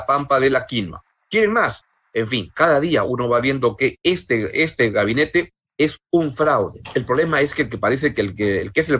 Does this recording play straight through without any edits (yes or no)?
yes